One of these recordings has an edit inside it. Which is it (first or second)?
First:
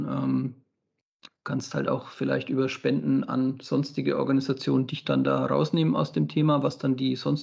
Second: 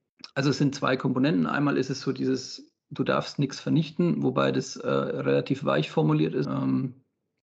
second